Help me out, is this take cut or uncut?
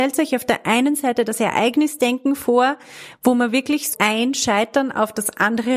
cut